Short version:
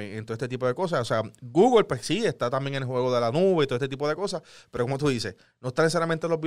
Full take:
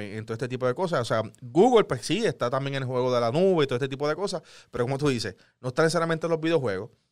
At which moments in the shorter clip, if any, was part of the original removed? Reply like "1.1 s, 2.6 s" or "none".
none